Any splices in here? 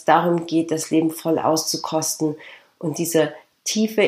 no; 0 cuts

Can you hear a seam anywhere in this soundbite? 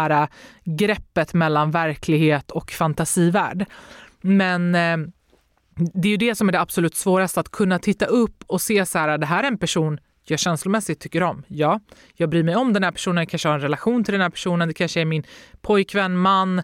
no; 0 cuts

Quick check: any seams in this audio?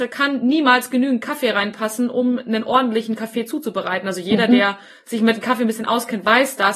no; 0 cuts

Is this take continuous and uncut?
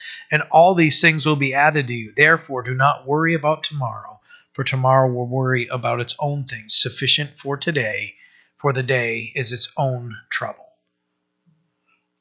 yes; 0 cuts

